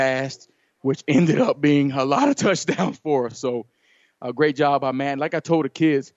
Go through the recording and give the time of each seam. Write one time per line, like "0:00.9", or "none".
none